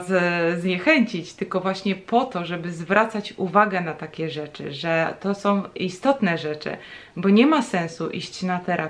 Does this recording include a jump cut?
no; 0 cuts

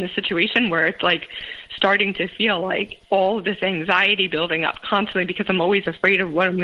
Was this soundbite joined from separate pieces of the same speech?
yes; 1 cut; at 3.0 s

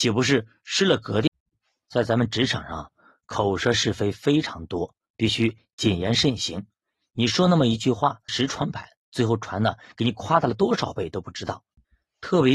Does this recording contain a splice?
yes; 1 cut; at 8.3 s

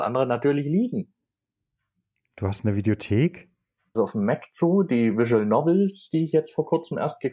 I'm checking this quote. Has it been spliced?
yes; 1 cut; at 3.9 s

